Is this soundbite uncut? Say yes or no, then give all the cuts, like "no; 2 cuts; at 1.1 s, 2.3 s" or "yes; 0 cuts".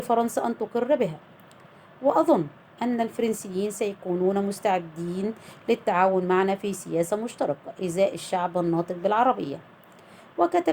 yes; 0 cuts